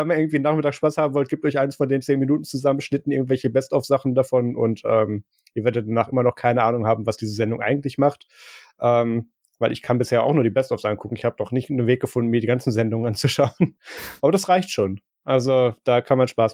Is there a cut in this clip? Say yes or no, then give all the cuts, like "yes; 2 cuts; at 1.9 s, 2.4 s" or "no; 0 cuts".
no; 0 cuts